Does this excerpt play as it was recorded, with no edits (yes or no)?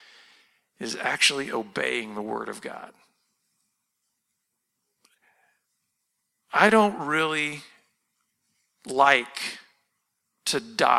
yes